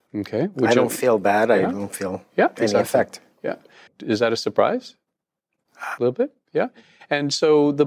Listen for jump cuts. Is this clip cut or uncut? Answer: cut